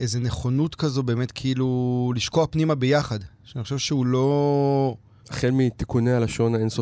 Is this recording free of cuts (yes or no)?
no